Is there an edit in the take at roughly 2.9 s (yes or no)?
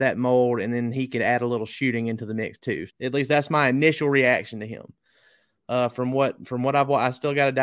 yes